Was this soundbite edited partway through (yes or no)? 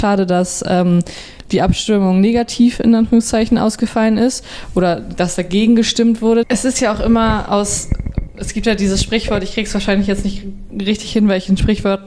yes